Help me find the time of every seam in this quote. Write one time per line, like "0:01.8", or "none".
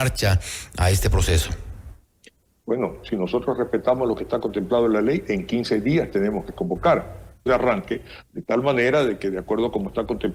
0:07.5